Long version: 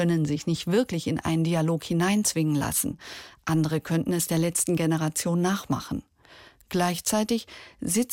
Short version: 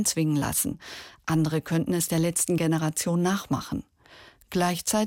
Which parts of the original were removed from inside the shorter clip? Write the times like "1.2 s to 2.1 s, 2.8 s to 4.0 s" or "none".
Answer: none